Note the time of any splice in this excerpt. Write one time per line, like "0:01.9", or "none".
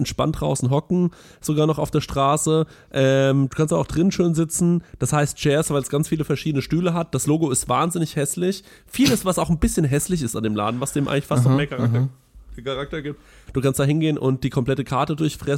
0:13.5